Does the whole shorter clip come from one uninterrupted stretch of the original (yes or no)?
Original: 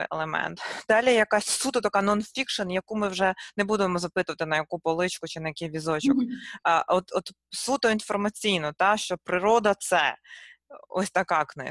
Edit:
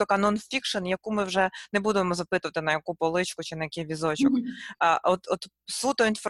yes